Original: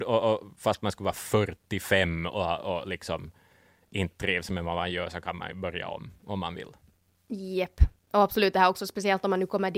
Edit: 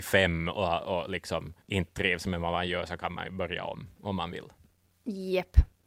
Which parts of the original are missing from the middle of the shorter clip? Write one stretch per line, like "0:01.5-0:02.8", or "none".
0:03.4-0:03.8